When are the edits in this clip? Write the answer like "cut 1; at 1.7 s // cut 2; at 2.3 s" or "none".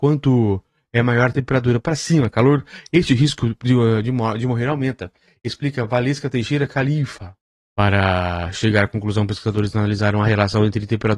cut 1; at 7.5 s